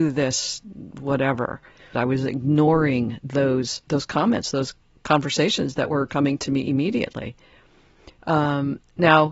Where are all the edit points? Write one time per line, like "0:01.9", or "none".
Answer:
0:01.9
0:03.8

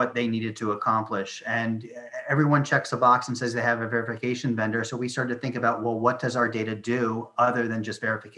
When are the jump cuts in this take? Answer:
none

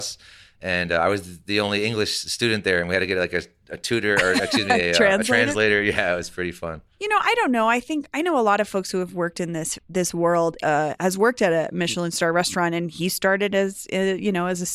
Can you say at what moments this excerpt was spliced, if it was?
0:10.6

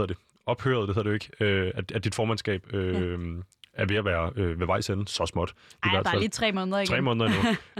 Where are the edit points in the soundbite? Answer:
none

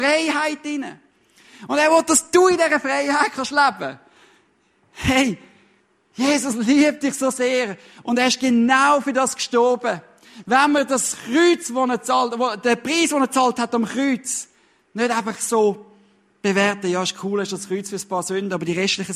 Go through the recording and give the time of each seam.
none

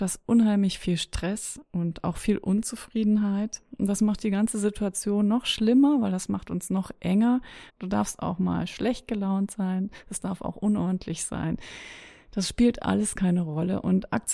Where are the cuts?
0:07.7

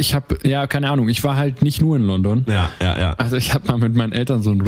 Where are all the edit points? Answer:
none

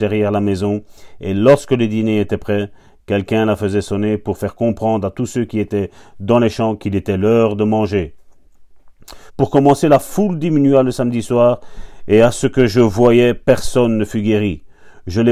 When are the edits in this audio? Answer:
0:09.3

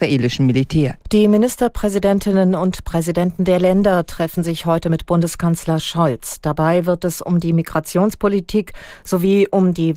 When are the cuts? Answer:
0:01.0

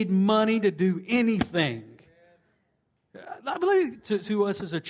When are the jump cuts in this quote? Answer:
0:03.9

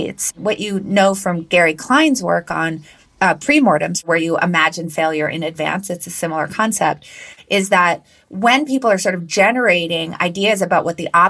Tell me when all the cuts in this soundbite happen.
none

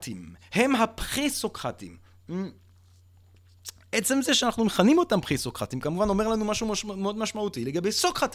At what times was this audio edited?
none

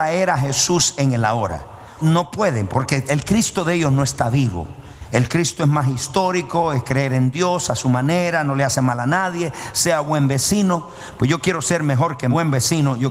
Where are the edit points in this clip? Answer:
0:02.0

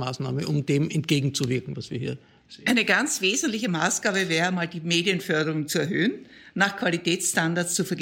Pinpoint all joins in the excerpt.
none

